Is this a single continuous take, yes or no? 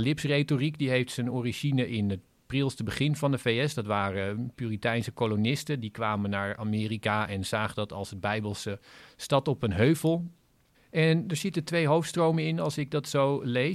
no